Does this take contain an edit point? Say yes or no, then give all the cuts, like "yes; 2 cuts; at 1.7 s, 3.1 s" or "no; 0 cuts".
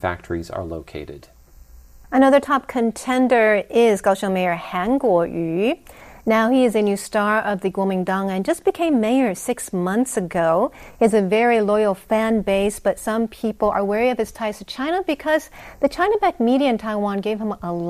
no; 0 cuts